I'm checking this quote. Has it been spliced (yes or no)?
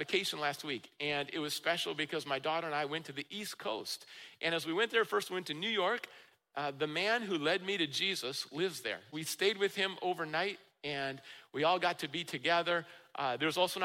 yes